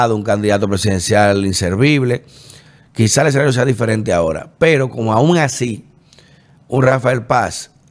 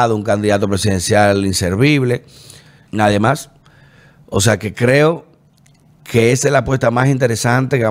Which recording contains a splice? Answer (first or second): second